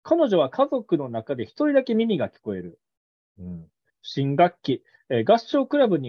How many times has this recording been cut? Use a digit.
1